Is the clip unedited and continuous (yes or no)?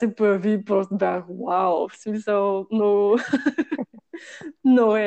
yes